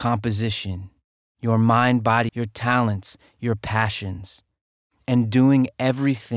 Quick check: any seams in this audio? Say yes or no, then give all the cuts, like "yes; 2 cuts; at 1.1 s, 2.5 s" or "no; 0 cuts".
yes; 1 cut; at 2.3 s